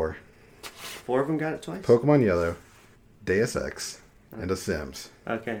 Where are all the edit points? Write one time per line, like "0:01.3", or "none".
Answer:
0:04.3